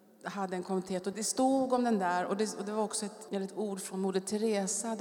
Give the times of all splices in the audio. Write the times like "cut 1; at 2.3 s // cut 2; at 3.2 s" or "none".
cut 1; at 1.1 s // cut 2; at 3.3 s